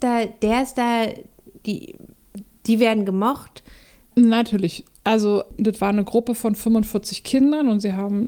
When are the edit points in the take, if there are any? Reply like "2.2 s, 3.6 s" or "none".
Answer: 4.1 s

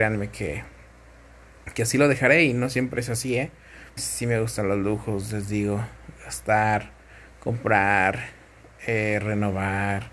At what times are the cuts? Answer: 4.0 s

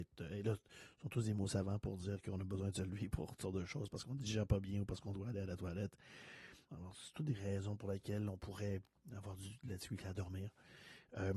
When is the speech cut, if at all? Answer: 6.7 s

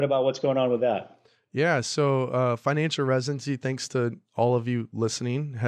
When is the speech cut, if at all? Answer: none

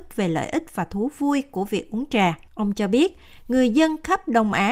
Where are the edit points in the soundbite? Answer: 2.5 s

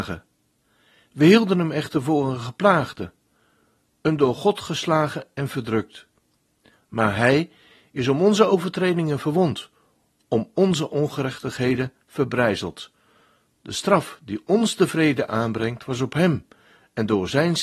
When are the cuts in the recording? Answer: none

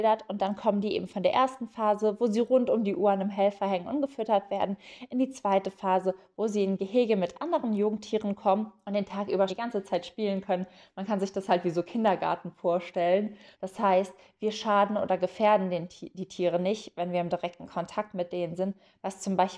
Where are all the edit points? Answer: 9.5 s, 13.5 s

